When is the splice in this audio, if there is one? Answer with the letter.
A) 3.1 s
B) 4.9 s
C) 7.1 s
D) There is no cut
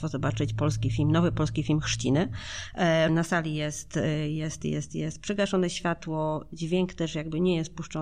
A